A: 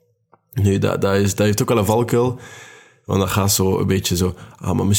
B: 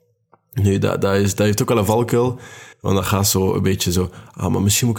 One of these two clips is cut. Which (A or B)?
B